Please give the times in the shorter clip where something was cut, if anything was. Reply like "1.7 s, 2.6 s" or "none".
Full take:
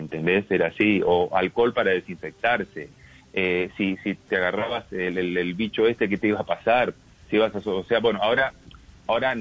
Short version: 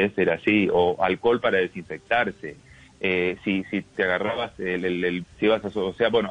5.2 s